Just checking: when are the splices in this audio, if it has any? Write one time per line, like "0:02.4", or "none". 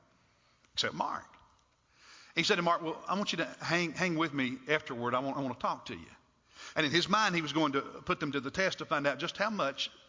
0:06.7